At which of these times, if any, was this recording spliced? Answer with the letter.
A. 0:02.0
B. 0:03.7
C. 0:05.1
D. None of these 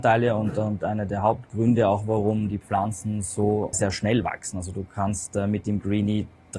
B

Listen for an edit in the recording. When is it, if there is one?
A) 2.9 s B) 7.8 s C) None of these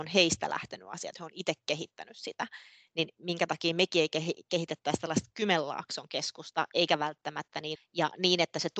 B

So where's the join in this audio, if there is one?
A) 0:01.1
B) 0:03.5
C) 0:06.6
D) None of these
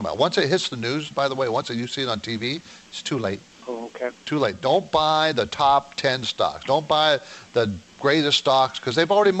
A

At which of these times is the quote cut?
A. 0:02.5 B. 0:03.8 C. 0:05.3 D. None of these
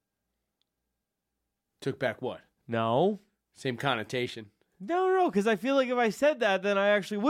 A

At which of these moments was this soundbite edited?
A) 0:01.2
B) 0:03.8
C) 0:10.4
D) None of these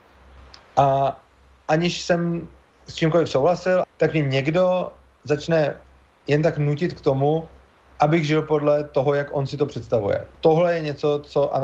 B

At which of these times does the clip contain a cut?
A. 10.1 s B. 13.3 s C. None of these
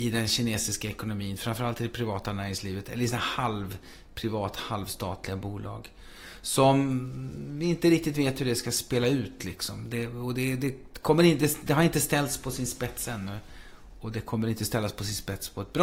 C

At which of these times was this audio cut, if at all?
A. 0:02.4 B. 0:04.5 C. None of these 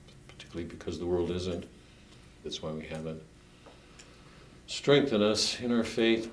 A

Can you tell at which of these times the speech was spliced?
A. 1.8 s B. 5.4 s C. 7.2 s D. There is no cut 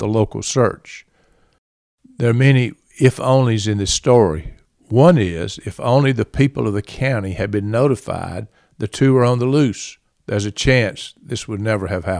D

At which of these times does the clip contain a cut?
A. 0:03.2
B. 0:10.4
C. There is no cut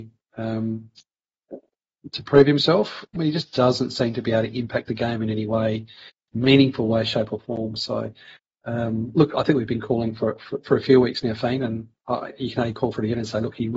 A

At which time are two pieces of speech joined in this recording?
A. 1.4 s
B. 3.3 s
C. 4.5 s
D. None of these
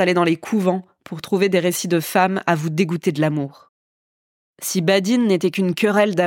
C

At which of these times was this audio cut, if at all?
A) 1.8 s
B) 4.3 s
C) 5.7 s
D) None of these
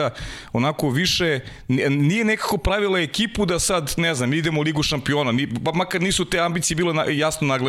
D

